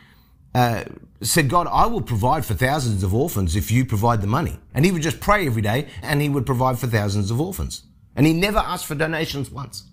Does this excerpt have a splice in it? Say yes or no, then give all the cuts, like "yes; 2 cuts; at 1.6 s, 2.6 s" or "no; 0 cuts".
yes; 2 cuts; at 4.7 s, 6.0 s